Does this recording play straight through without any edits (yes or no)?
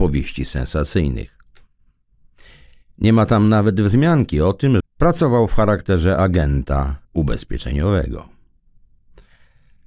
no